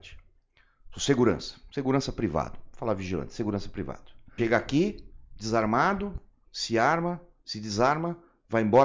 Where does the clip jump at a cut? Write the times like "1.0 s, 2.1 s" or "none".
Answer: 4.4 s

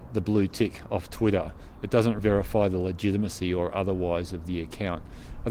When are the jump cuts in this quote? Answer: 2.2 s

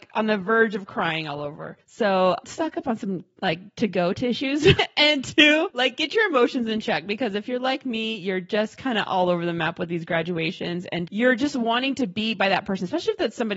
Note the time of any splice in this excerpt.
none

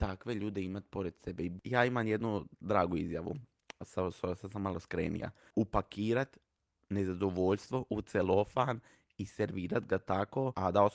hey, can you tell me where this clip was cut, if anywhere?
1.6 s, 5.5 s

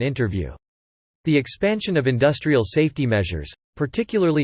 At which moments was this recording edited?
1.1 s

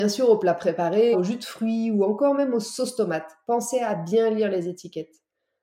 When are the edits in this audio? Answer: 1.1 s

